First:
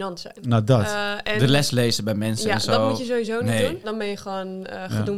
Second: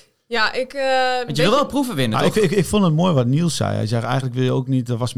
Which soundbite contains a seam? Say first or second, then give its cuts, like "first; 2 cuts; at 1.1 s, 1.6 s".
first; 1 cut; at 3.8 s